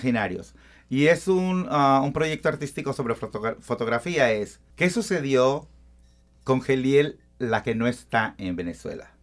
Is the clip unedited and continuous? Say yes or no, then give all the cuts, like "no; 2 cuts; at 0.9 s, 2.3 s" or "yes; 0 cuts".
no; 1 cut; at 4.7 s